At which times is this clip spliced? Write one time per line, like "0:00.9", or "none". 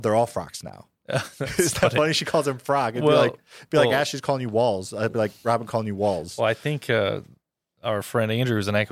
none